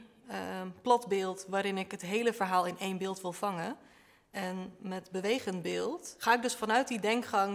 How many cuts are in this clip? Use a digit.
0